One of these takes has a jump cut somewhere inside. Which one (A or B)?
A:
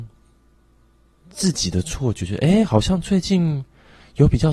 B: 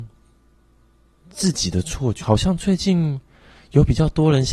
B